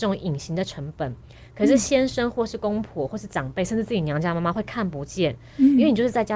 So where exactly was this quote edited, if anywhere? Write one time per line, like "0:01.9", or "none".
none